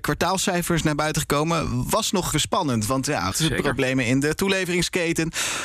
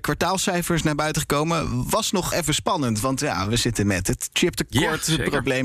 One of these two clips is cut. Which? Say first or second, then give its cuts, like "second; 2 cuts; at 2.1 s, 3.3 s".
first; 2 cuts; at 2.3 s, 3.3 s